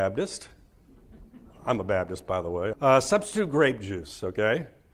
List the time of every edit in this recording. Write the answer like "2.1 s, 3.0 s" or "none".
2.7 s